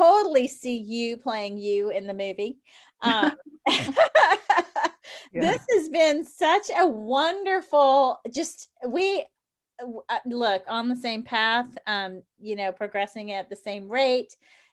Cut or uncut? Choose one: cut